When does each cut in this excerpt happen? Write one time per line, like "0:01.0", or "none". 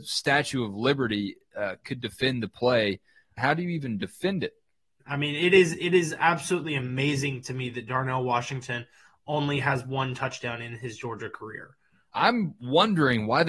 0:03.4
0:05.0
0:12.1